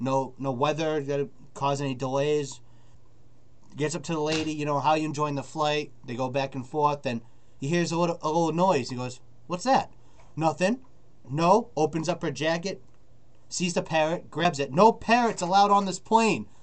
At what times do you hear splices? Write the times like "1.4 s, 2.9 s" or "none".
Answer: 11.2 s

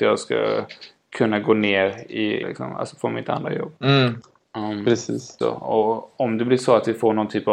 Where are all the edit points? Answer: 2.4 s, 3.8 s, 5.4 s

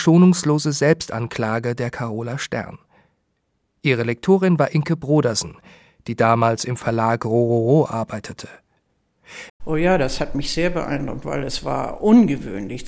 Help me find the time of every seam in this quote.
9.5 s

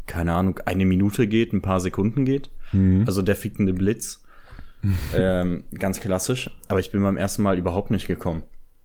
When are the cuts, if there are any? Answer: none

